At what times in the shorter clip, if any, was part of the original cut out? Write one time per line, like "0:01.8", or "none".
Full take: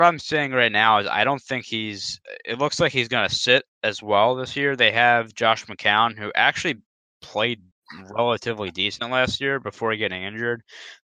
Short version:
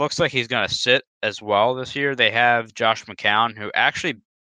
none